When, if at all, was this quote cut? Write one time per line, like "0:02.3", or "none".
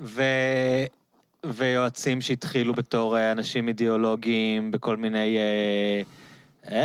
none